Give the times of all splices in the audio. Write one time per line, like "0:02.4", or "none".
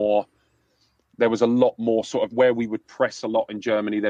0:02.3